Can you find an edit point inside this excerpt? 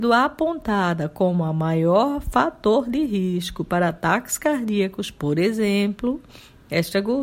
no; 0 cuts

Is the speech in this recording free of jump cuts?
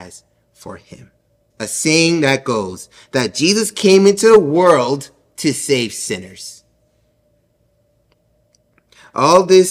no; 1 cut; at 1.5 s

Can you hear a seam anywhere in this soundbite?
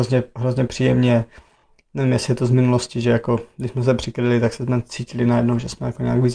no; 0 cuts

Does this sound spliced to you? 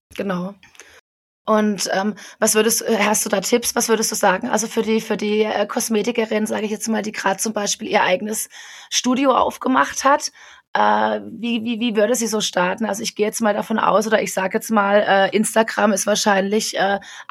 no; 0 cuts

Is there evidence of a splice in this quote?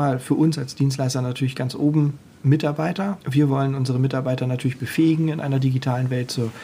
yes; 1 cut; at 3.2 s

